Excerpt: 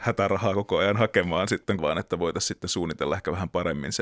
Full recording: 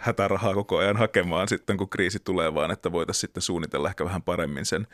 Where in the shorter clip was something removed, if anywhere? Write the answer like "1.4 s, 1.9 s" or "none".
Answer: 1.8 s